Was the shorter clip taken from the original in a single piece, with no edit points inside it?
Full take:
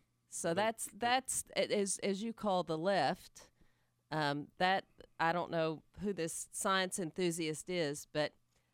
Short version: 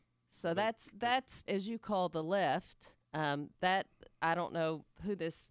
no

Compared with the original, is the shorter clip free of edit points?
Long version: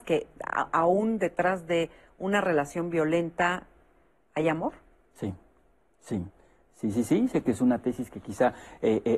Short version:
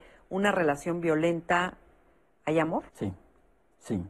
no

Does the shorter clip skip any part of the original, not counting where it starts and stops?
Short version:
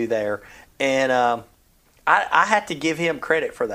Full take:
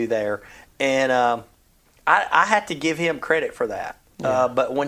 no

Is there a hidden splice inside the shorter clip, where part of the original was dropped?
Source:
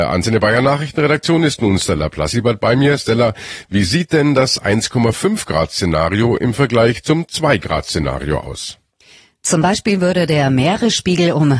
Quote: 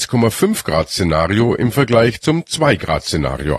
no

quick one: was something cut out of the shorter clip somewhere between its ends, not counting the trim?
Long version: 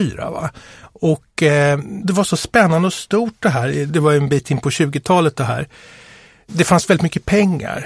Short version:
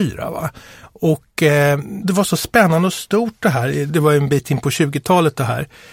no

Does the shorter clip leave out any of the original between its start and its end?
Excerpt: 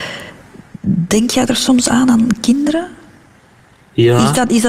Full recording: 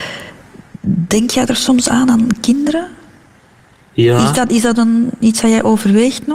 no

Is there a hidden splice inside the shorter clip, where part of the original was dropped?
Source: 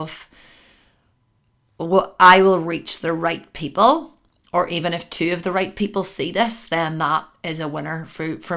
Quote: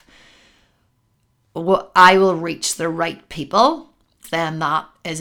yes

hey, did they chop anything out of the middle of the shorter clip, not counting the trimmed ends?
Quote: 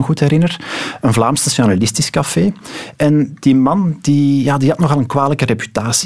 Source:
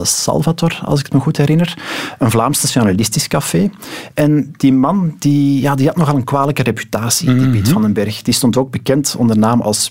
no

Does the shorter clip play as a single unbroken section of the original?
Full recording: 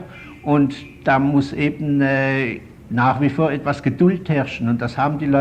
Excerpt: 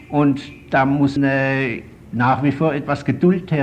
no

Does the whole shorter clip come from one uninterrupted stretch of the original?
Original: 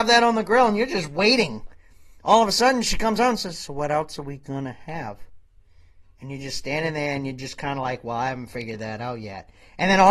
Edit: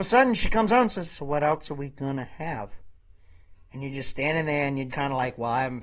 no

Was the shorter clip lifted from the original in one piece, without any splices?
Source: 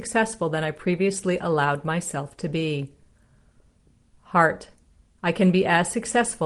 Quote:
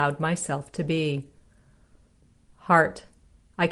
yes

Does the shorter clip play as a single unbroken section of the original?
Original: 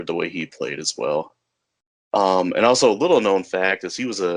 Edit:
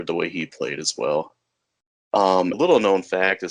no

